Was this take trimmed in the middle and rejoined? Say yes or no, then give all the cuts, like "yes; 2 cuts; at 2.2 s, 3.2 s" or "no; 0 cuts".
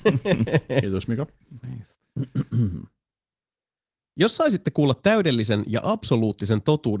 no; 0 cuts